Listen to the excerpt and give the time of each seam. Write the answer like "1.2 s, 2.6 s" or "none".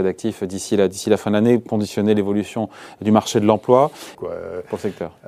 4.1 s